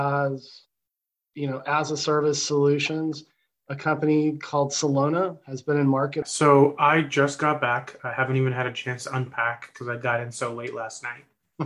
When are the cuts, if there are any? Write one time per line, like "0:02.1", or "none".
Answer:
0:06.2